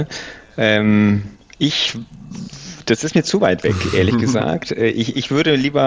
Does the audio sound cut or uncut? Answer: uncut